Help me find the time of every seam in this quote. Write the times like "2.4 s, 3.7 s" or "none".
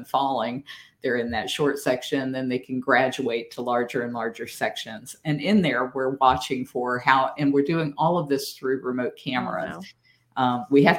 none